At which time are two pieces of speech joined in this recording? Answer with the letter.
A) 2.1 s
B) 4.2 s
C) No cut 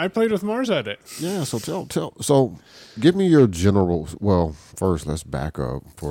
C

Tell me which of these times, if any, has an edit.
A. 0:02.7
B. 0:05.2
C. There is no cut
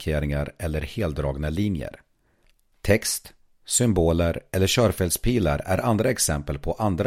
A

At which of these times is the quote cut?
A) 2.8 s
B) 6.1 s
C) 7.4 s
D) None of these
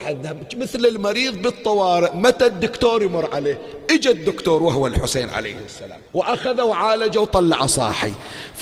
B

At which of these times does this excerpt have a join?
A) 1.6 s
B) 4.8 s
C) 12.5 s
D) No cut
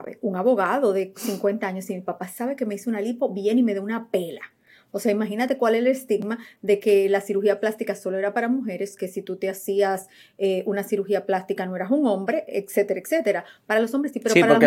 D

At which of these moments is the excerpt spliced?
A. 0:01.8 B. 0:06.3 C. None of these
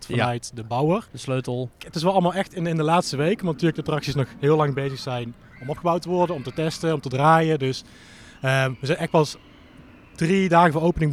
A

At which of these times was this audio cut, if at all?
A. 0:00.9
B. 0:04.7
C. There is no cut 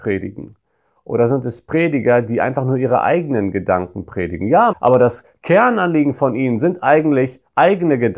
B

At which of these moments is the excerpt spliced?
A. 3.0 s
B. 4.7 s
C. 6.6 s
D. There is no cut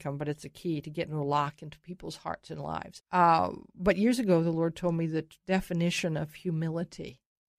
A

